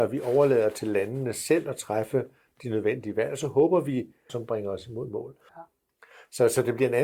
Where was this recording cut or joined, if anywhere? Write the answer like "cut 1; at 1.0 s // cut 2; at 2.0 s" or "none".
cut 1; at 4.3 s // cut 2; at 5.5 s